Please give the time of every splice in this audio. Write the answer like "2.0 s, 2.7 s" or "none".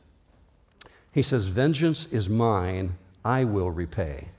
none